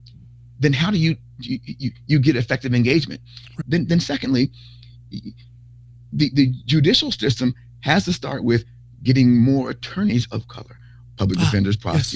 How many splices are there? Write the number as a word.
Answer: two